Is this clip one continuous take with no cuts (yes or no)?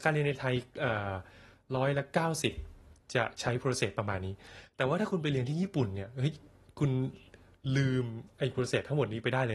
yes